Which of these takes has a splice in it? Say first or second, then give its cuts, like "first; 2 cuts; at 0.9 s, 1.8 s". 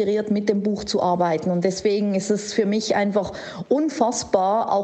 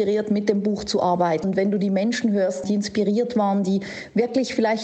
second; 2 cuts; at 1.4 s, 2.6 s